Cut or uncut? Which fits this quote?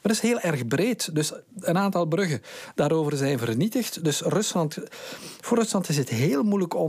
uncut